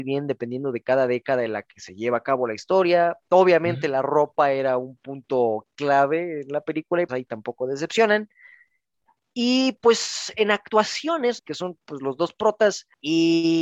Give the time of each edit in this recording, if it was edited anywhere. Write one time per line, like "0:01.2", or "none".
0:07.1
0:11.4